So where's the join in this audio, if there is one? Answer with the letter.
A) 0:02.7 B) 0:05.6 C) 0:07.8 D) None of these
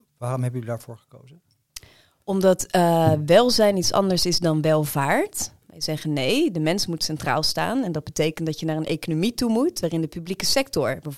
B